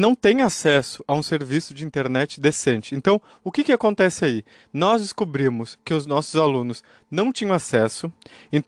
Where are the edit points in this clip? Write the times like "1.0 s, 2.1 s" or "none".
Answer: none